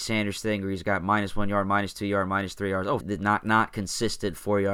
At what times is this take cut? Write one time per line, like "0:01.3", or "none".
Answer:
0:03.0